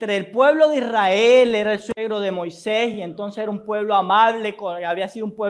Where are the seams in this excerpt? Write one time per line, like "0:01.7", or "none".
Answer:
none